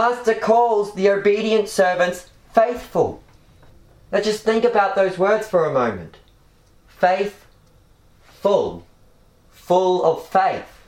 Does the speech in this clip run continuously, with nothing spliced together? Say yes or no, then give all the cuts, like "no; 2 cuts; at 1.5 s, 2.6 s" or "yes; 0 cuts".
yes; 0 cuts